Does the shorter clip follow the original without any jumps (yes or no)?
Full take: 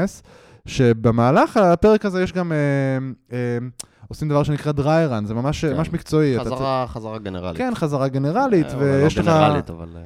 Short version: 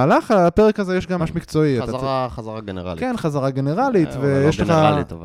no